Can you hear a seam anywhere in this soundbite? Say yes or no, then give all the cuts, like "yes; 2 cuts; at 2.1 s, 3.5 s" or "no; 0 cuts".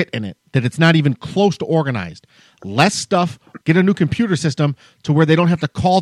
yes; 1 cut; at 3.6 s